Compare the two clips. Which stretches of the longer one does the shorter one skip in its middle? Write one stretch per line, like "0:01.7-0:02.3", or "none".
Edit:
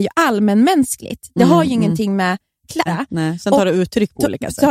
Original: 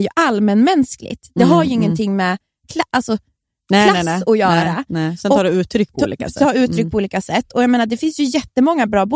0:02.9-0:04.6

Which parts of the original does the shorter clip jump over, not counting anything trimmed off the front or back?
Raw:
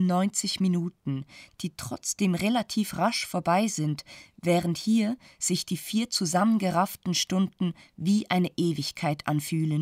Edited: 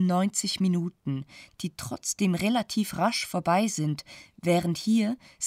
none

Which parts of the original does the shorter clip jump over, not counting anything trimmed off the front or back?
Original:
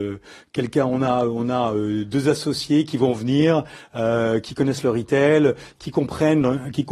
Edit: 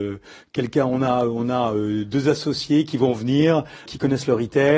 0:03.9-0:04.4

